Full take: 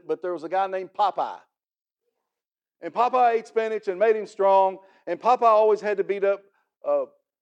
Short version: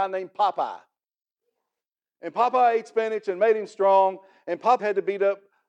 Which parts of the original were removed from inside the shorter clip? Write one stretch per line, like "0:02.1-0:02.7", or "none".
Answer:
0:05.4-0:05.8